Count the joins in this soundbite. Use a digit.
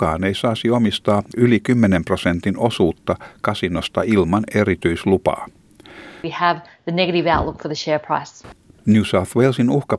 2